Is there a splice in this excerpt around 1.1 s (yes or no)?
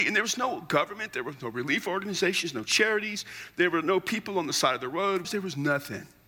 no